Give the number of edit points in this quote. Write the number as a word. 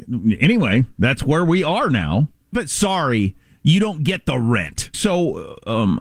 two